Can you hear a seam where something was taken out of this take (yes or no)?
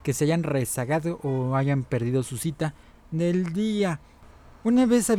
no